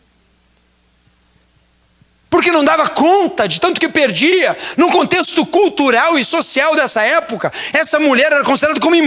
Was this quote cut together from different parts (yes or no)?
no